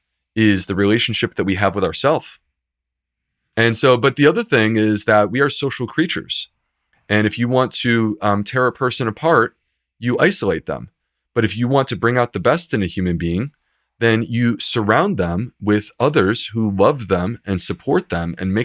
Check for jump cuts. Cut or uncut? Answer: cut